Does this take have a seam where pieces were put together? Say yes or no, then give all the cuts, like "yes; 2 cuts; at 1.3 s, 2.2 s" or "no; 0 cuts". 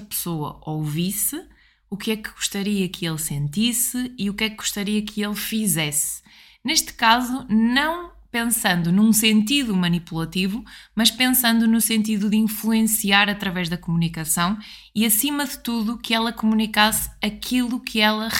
no; 0 cuts